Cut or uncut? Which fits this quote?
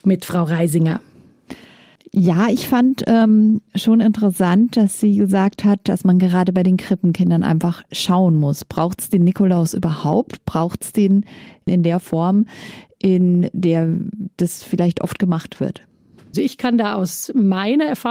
uncut